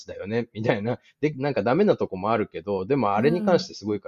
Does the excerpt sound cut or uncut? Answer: uncut